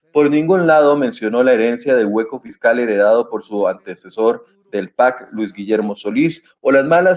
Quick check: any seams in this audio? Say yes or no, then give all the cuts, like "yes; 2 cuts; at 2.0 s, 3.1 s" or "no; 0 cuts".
no; 0 cuts